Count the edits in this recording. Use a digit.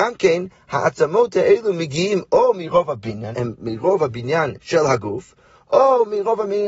1